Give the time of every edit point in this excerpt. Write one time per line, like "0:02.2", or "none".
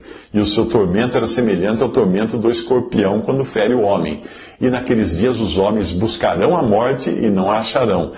none